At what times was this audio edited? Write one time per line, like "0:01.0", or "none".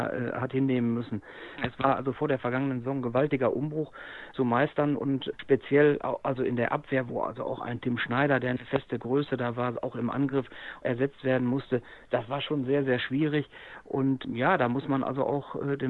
0:01.6